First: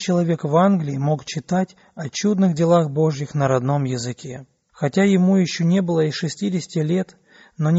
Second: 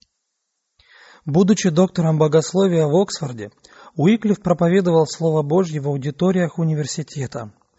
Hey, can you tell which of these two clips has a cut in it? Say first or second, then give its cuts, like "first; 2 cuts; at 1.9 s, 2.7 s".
first; 1 cut; at 4.7 s